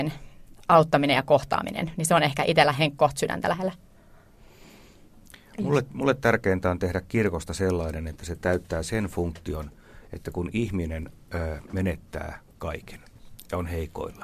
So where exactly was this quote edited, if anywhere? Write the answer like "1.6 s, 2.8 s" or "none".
none